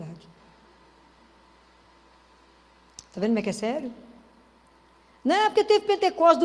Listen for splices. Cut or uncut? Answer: uncut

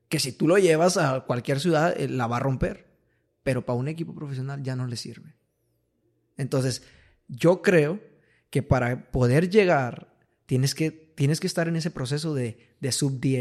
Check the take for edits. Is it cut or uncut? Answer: uncut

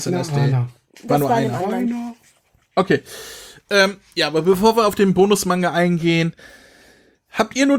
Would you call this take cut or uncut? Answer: uncut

